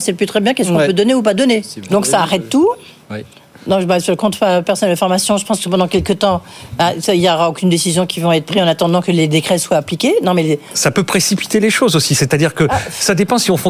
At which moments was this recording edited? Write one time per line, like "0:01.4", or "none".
0:01.9